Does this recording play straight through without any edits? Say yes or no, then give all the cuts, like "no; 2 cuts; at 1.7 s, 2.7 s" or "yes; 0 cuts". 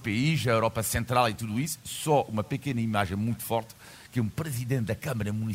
yes; 0 cuts